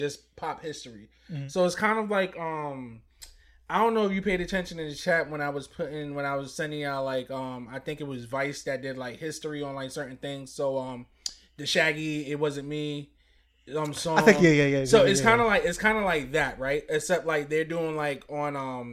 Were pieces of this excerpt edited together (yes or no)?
no